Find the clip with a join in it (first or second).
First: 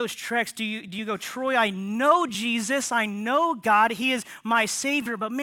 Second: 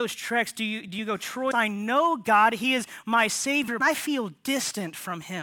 second